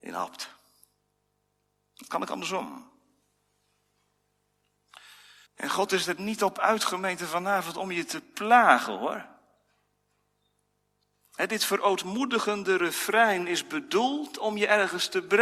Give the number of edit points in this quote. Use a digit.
1